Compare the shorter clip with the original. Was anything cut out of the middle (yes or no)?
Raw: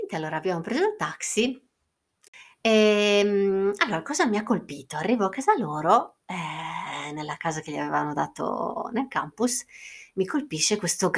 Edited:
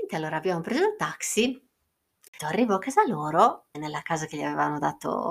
yes